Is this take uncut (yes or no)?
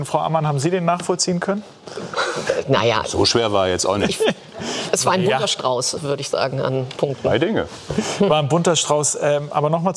yes